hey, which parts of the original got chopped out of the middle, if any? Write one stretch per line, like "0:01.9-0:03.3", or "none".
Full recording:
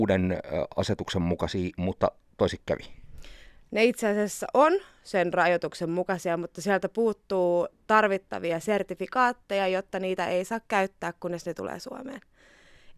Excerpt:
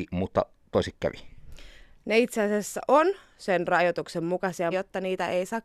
0:06.4-0:09.7